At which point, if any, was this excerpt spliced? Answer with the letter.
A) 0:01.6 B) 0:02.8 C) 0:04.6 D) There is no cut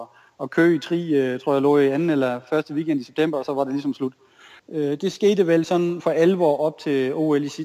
C